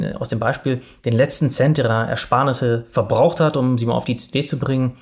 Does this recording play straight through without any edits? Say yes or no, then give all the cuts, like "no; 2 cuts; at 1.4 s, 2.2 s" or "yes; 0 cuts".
yes; 0 cuts